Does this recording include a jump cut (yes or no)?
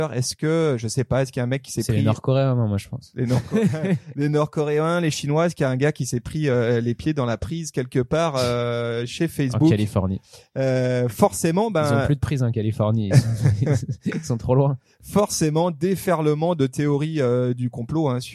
no